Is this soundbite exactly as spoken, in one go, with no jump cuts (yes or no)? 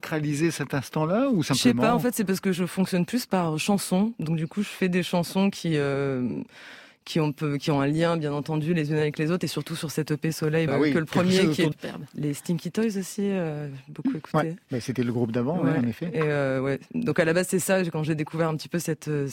no